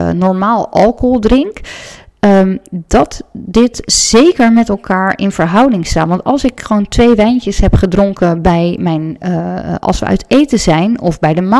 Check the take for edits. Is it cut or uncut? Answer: uncut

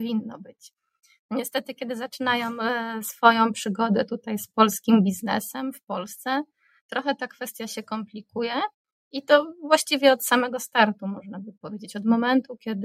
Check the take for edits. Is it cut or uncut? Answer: uncut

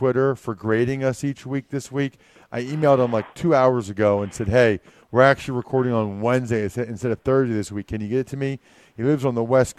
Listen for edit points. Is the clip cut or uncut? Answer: uncut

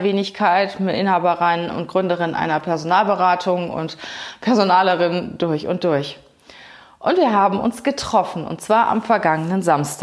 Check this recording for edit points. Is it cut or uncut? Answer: uncut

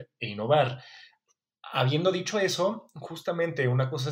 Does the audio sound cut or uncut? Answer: uncut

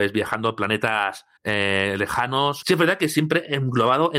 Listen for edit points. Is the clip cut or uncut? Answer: cut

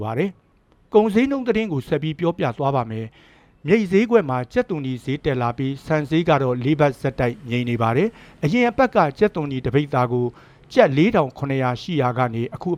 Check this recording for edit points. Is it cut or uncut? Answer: uncut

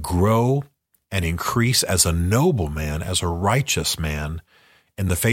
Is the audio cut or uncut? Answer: cut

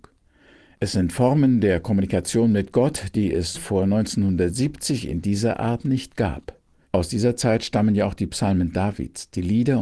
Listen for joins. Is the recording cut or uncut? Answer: cut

